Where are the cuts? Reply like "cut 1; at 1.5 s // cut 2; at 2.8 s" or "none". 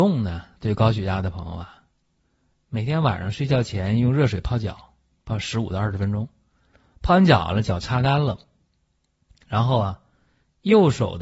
none